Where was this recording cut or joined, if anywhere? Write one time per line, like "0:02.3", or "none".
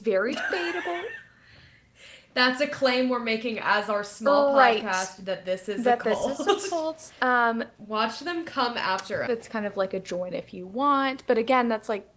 0:09.3